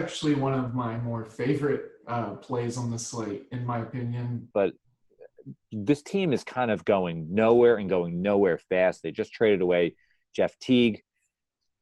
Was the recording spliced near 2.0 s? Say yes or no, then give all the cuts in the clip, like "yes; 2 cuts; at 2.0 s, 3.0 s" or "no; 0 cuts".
no; 1 cut; at 4.5 s